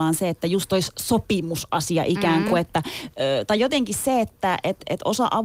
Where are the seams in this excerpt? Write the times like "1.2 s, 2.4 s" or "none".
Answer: none